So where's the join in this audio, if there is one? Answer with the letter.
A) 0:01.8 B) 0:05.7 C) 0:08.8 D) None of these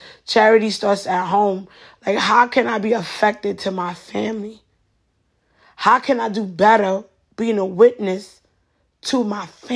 D